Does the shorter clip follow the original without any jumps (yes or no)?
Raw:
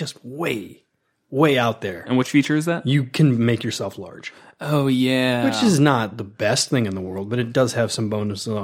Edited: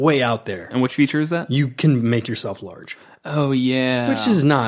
yes